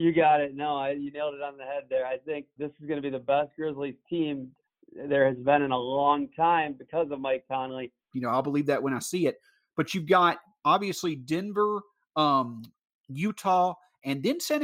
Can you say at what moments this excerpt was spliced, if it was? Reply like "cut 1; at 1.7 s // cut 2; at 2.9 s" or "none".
cut 1; at 2.6 s // cut 2; at 8.1 s